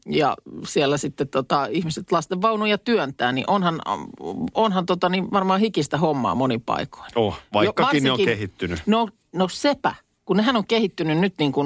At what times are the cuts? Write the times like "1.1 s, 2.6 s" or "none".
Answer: none